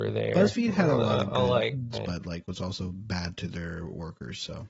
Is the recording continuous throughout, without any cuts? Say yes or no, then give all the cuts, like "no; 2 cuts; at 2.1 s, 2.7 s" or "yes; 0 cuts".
no; 1 cut; at 1.9 s